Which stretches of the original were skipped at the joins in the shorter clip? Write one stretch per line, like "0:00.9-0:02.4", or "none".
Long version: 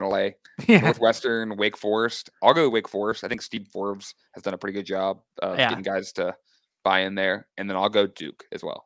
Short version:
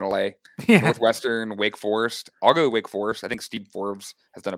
none